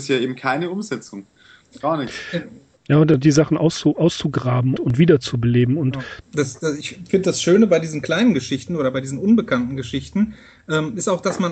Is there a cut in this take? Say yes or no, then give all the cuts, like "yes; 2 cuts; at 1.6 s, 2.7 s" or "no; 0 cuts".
yes; 3 cuts; at 2.8 s, 4.8 s, 6.2 s